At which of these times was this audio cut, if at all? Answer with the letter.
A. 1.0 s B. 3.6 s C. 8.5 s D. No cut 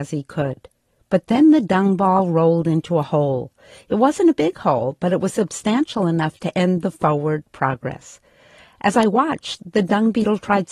A